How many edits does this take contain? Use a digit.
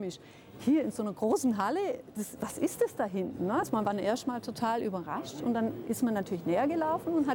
0